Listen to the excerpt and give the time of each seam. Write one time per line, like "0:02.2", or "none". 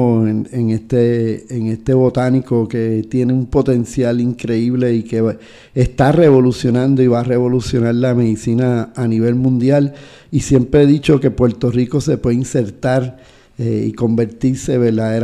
none